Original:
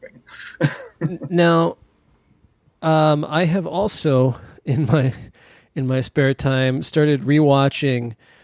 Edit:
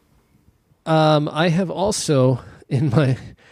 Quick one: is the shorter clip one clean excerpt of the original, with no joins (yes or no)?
yes